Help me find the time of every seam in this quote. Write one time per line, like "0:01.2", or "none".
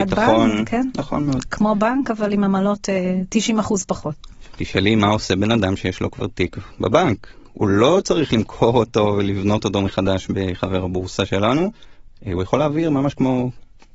none